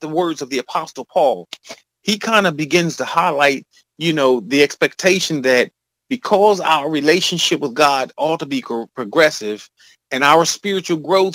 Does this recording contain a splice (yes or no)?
no